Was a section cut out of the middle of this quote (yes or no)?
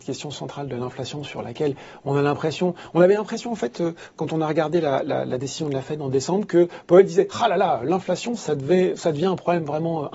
no